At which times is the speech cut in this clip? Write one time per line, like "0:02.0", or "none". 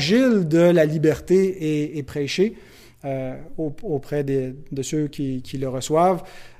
none